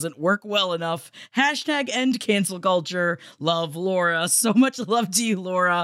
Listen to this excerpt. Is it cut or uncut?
uncut